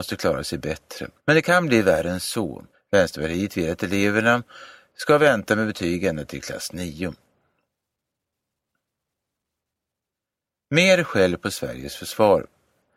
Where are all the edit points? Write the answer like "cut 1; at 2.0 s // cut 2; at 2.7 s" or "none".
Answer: cut 1; at 1.2 s // cut 2; at 2.7 s